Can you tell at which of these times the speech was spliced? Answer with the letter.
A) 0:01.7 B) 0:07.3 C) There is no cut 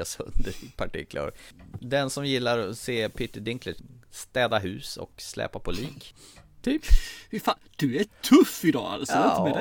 A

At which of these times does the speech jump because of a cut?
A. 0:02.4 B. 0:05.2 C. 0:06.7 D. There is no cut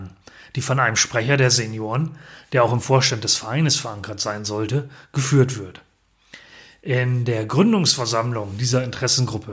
D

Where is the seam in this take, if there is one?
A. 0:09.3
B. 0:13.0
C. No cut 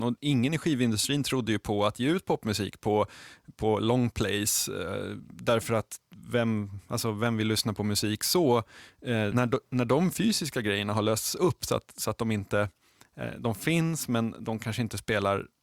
A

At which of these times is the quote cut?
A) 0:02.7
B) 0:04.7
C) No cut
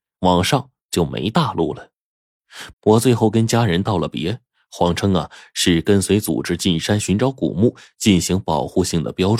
A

